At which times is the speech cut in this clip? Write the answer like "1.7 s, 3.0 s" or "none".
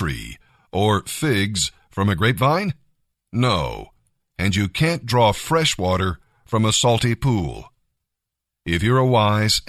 none